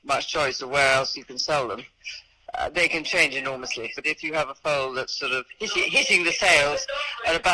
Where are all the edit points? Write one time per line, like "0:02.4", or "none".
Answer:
0:03.9

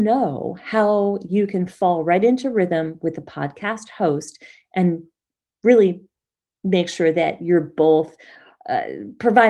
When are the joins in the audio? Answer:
none

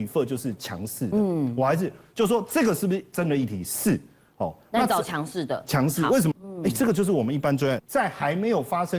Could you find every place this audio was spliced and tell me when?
0:06.3
0:07.8

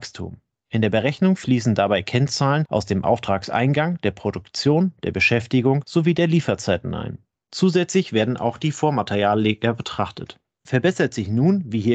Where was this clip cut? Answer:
none

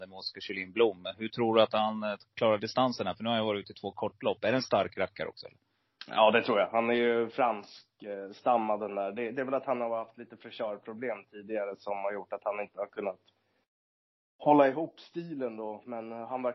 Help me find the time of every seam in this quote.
none

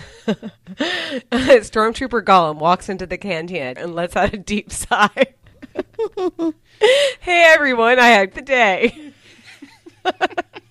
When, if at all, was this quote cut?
0:03.8
0:08.3

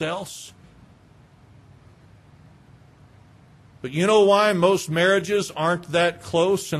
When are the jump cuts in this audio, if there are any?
none

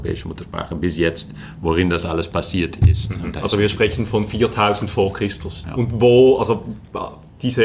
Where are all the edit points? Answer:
0:05.6

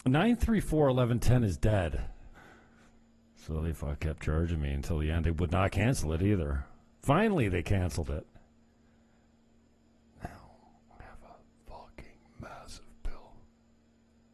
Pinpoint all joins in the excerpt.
0:02.3
0:04.0

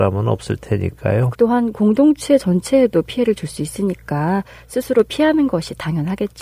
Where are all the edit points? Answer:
0:01.3

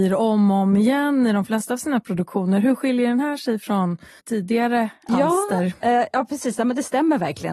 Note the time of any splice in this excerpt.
0:04.2

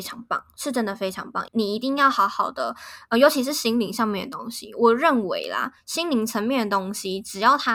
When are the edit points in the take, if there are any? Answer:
0:01.5

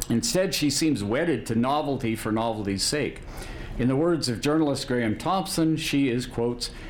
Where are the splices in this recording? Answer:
0:03.7

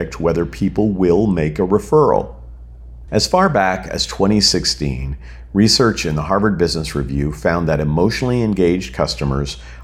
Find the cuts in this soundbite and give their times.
0:03.1

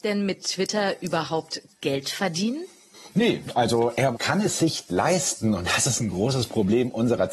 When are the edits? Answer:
none

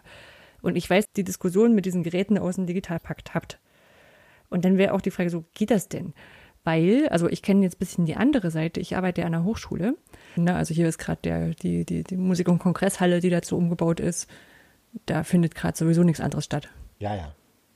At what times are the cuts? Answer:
0:01.1
0:10.4

